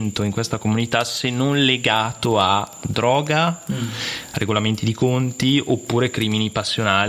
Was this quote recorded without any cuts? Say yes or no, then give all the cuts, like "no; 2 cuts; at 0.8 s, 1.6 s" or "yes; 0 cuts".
yes; 0 cuts